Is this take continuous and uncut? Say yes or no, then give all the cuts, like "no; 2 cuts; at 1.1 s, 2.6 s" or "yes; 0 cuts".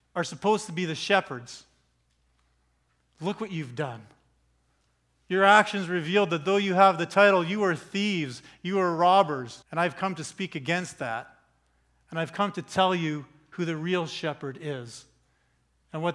no; 1 cut; at 9.6 s